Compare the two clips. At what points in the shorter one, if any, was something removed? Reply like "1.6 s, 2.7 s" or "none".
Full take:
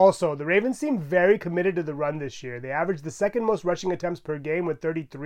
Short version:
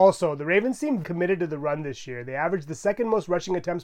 1.0 s